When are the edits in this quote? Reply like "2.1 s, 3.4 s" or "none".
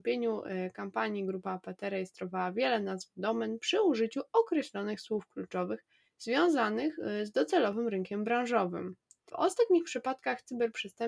9.3 s

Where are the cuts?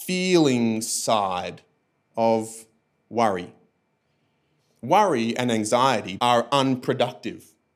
6.2 s

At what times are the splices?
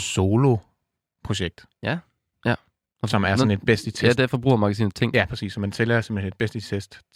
2.3 s

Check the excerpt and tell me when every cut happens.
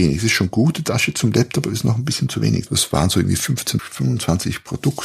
2.7 s, 3.8 s

